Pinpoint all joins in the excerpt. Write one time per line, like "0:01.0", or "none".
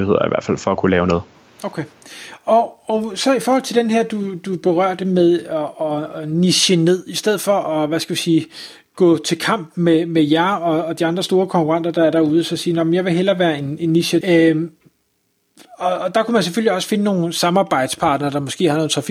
0:14.2